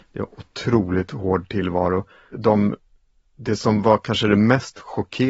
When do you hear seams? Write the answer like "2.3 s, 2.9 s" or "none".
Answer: 2.3 s